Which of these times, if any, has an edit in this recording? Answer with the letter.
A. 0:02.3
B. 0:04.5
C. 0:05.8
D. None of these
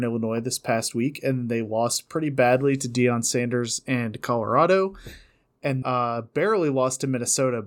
C